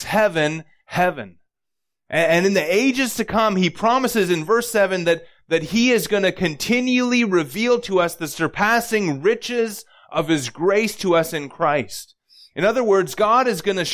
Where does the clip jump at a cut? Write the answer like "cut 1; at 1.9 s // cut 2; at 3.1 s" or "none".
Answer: none